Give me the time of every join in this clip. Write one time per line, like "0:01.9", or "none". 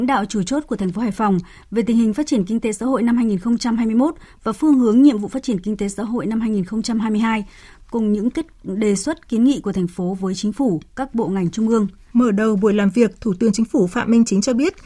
0:12.1